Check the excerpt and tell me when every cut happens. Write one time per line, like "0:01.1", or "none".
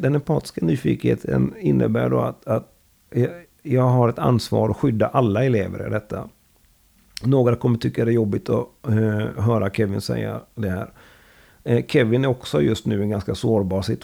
none